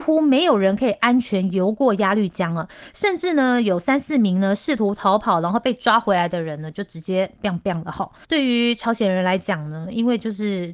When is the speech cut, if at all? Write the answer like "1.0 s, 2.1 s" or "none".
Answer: none